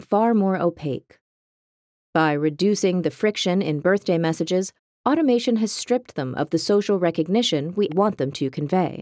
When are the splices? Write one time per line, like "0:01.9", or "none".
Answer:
0:07.9